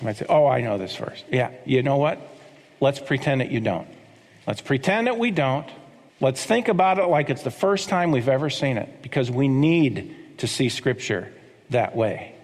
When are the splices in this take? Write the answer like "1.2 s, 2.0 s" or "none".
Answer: none

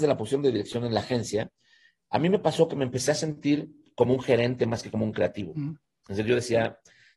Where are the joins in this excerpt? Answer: none

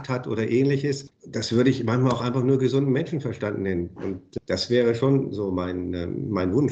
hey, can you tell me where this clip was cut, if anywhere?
1.1 s, 4.0 s

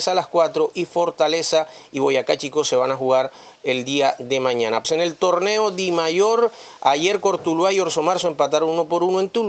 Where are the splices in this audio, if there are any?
4.8 s

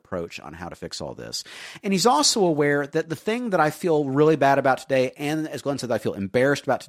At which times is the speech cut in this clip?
none

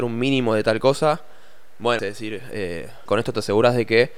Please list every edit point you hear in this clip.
2.0 s, 3.1 s

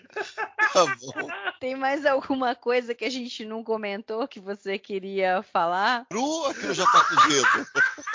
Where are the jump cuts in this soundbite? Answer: 1.6 s, 6.1 s

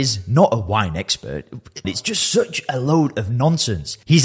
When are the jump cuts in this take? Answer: 1.8 s

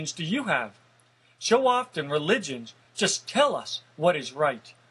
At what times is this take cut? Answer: none

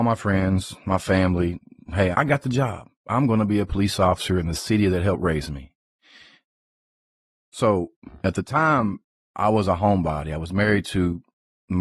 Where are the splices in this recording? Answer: 2.1 s

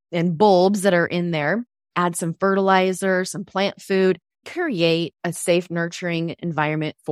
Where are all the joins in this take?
4.4 s

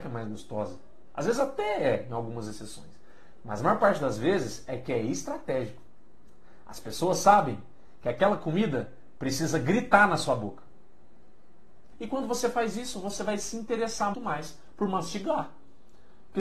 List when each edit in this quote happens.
11.9 s, 14.1 s

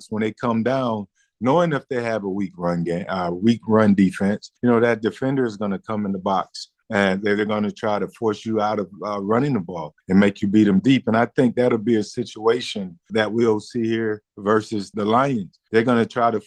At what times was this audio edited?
none

